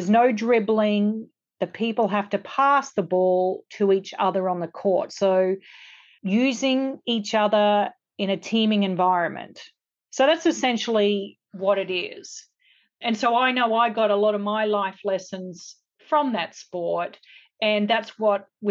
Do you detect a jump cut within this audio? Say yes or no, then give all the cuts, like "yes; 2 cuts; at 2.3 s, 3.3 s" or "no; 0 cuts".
no; 0 cuts